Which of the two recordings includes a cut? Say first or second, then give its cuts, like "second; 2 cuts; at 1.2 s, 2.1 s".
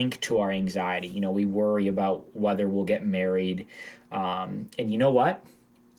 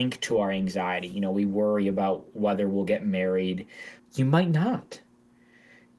second; 1 cut; at 4.0 s